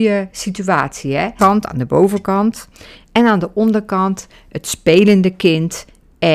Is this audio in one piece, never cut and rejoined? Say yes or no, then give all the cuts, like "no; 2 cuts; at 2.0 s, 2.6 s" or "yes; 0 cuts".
no; 1 cut; at 1.4 s